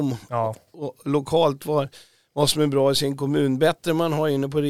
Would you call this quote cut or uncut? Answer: uncut